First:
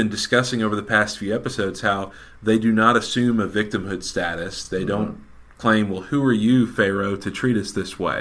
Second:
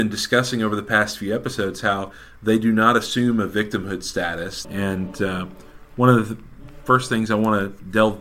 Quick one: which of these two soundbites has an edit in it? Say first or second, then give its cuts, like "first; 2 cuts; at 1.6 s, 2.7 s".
second; 1 cut; at 4.6 s